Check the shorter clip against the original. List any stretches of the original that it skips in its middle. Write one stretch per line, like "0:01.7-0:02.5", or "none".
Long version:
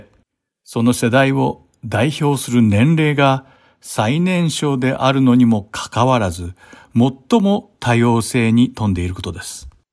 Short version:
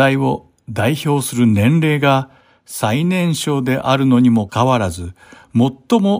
0:05.6-0:05.9

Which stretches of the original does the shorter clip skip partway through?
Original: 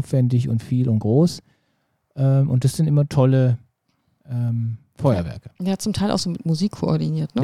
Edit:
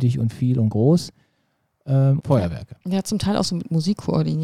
0:02.5-0:04.9

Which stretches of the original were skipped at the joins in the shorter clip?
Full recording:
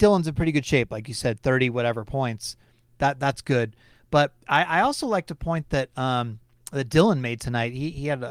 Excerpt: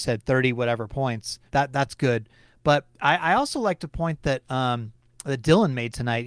0:02.6-0:02.9

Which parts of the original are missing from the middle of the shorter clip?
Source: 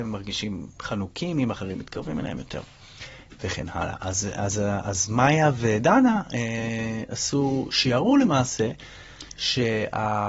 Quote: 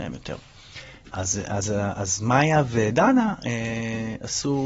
0:03.4-0:04.0

